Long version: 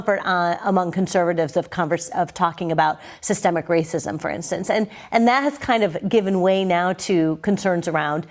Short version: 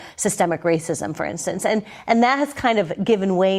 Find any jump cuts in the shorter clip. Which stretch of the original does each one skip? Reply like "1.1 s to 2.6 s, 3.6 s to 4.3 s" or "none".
none